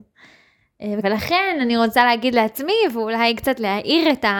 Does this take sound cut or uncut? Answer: cut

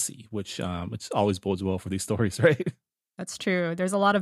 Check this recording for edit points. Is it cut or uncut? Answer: uncut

